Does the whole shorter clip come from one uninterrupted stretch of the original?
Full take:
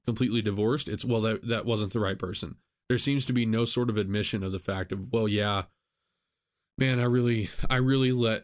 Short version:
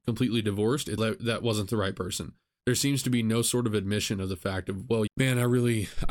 no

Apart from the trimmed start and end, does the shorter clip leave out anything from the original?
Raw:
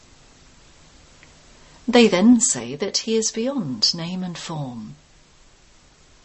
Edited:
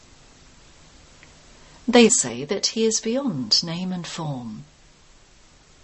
yes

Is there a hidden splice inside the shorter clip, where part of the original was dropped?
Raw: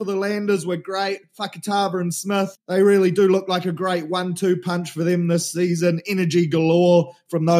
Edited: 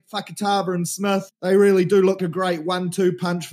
yes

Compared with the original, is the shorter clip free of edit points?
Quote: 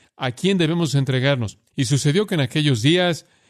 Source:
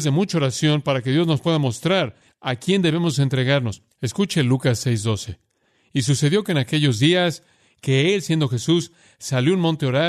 no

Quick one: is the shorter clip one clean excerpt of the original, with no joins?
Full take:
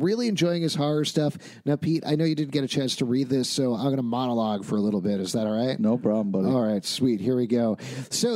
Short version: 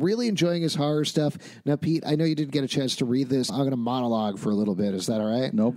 no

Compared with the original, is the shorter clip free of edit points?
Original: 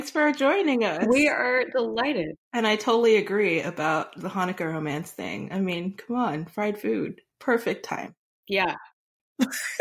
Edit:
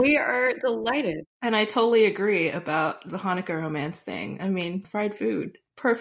no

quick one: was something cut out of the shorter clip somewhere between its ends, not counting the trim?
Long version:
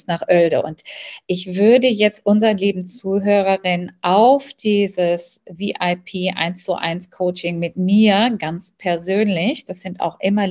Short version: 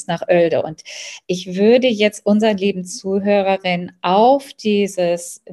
no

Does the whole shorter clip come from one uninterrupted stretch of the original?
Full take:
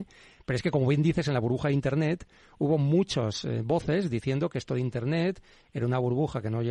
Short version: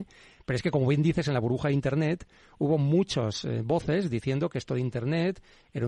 yes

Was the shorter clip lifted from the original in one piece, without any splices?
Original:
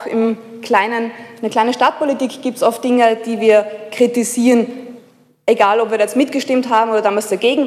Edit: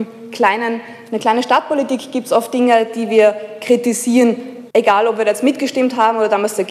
no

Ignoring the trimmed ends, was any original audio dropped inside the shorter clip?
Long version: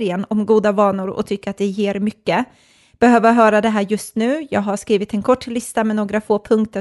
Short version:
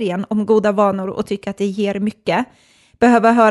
no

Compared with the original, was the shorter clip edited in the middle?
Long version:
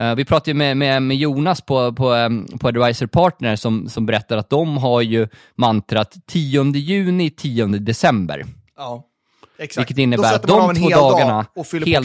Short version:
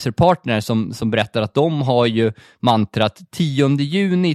no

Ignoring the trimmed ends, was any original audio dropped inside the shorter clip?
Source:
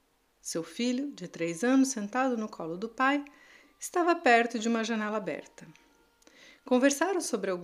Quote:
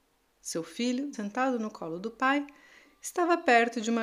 yes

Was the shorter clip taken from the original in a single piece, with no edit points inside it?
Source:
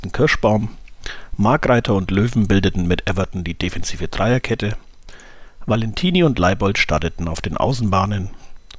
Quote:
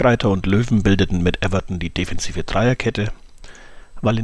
yes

